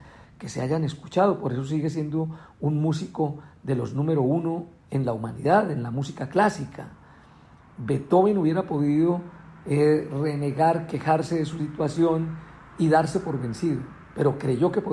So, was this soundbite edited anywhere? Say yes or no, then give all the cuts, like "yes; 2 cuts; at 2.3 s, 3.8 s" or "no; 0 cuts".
no; 0 cuts